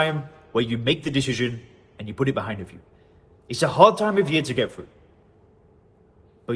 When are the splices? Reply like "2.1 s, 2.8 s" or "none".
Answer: 3.3 s